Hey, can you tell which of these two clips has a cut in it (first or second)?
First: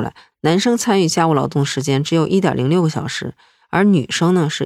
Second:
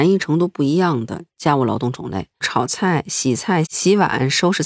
second